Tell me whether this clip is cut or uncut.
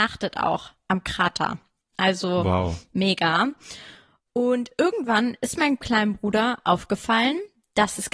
uncut